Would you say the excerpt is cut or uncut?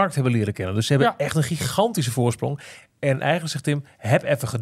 cut